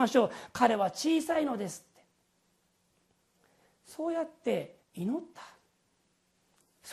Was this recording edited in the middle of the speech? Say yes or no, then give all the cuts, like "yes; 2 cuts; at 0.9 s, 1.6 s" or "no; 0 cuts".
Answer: yes; 1 cut; at 4.8 s